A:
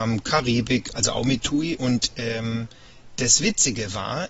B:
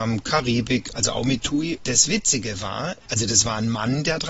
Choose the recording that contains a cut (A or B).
B